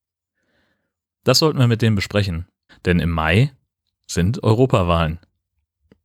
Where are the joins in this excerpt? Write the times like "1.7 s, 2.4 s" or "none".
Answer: 2.7 s